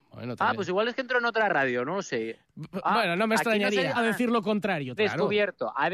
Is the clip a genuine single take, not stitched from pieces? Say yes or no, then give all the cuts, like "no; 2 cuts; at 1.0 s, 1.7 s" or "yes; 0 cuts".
no; 2 cuts; at 3.9 s, 5.0 s